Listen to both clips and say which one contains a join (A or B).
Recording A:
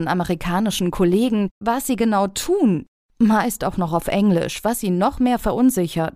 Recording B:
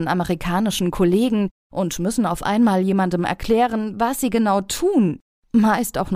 A